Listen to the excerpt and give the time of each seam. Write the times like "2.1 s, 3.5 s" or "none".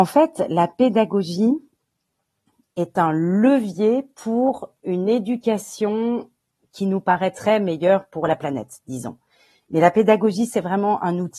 none